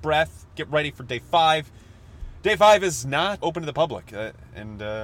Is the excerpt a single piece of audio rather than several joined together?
no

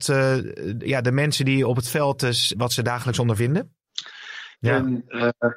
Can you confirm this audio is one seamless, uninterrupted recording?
no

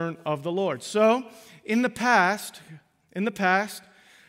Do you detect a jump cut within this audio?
no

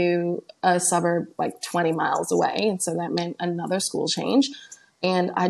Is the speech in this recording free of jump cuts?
yes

